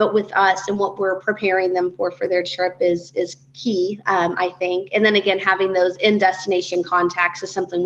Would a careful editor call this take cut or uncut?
uncut